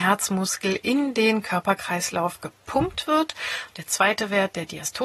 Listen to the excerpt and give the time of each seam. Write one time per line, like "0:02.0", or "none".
none